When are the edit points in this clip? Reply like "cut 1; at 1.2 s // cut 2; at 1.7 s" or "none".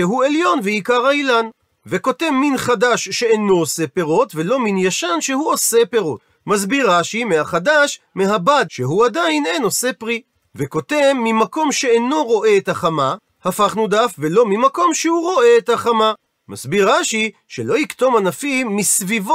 cut 1; at 8.7 s